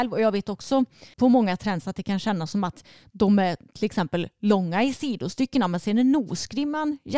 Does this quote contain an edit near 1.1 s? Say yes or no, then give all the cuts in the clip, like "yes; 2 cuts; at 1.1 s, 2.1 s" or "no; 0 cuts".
yes; 1 cut; at 1.1 s